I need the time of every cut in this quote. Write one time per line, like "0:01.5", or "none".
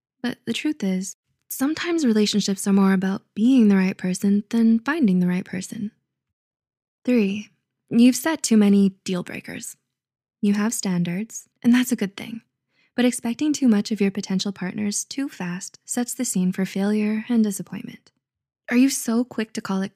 0:11.5